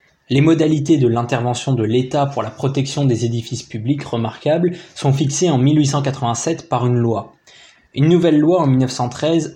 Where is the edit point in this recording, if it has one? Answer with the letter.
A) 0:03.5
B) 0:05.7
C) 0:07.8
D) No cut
C